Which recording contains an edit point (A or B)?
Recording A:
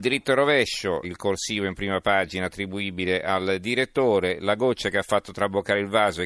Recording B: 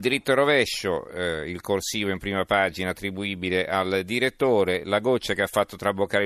A